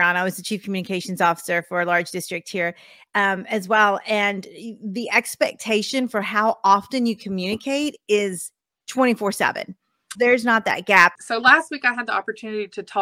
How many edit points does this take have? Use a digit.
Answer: 2